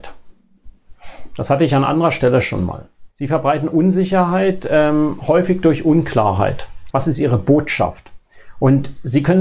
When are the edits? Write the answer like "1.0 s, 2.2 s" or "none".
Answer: 3.1 s, 6.9 s